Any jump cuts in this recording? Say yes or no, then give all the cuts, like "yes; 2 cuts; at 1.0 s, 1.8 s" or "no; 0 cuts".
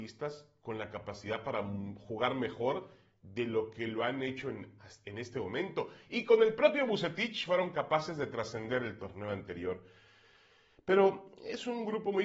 no; 0 cuts